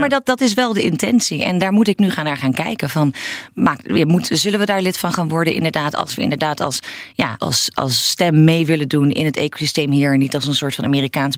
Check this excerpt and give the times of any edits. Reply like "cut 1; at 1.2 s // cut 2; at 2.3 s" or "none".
cut 1; at 7.4 s